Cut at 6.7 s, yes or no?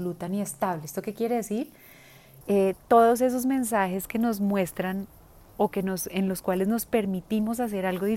no